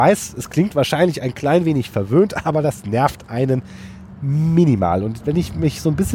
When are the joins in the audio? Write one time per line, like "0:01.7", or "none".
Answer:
none